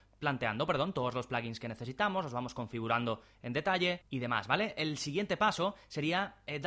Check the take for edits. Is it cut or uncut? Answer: uncut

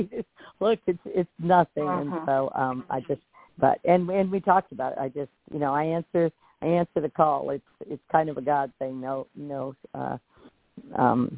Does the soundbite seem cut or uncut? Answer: uncut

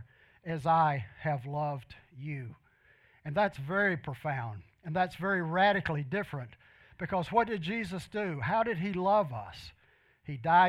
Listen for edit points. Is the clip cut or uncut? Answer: uncut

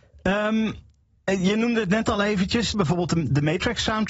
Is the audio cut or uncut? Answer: cut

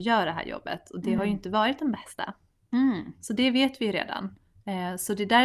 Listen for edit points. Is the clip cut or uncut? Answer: uncut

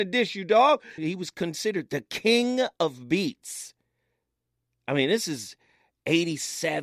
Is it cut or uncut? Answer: cut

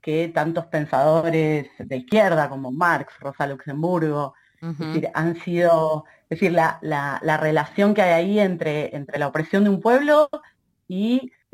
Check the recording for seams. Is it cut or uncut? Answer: uncut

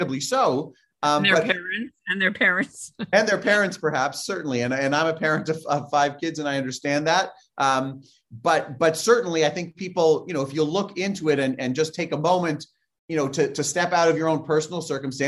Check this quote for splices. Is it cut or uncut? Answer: uncut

